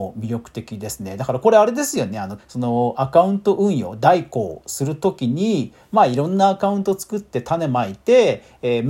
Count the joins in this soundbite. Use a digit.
1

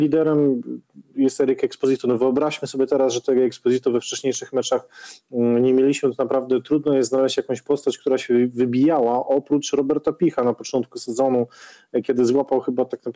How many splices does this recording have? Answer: 0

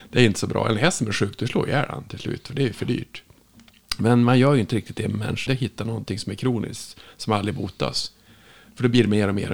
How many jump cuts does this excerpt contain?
1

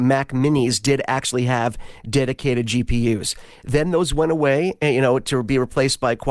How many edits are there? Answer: 0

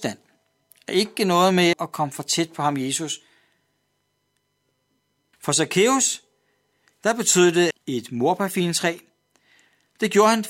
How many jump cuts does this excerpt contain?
3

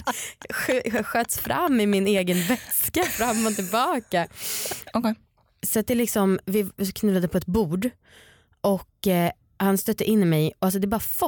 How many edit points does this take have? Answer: 1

